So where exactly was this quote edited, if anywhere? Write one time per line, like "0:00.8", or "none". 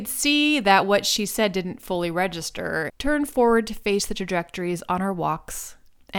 0:02.9

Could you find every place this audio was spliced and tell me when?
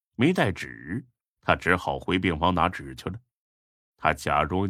0:03.8

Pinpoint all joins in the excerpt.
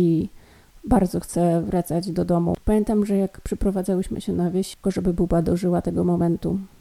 0:02.6
0:04.8

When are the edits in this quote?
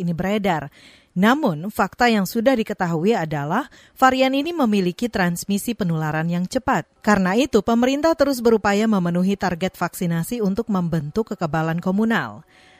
0:07.0

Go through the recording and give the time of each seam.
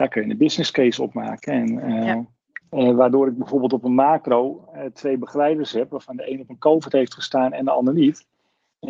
0:02.6

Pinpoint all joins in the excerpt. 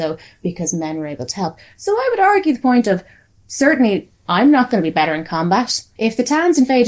0:06.0

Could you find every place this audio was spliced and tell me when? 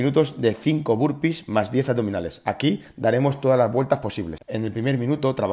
0:04.4

